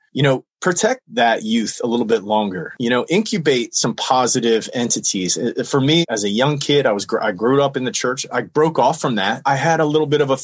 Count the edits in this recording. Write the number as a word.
zero